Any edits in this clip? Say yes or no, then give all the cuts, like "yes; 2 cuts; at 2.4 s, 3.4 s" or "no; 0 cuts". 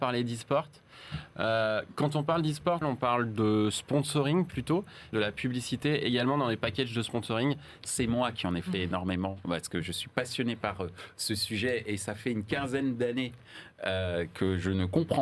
yes; 3 cuts; at 2.8 s, 5.1 s, 7.8 s